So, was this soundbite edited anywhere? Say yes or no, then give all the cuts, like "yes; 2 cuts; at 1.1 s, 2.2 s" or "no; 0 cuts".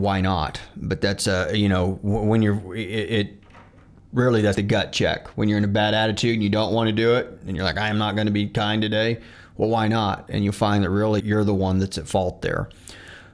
yes; 2 cuts; at 4.5 s, 11.2 s